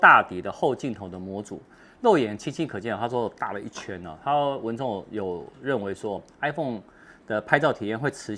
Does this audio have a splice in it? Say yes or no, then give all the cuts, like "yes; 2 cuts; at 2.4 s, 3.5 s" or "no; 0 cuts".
no; 0 cuts